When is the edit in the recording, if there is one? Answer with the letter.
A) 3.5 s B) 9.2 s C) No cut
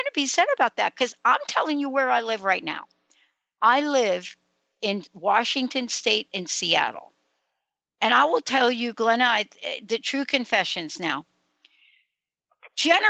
C